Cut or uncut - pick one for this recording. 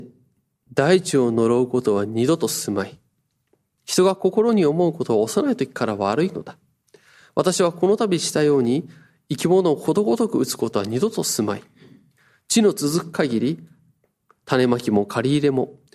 uncut